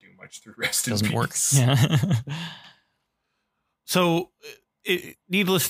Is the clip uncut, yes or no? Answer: yes